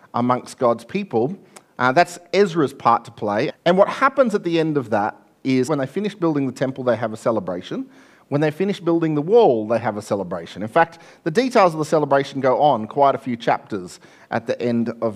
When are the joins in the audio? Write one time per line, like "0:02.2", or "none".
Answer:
0:03.5
0:05.7